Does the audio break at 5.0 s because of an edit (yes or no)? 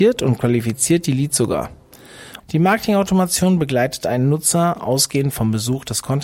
no